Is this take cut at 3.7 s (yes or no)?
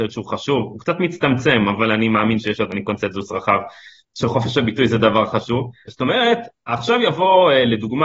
no